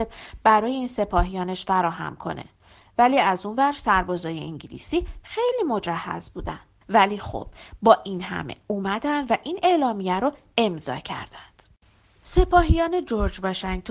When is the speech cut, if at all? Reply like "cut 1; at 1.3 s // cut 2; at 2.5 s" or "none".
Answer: cut 1; at 6.8 s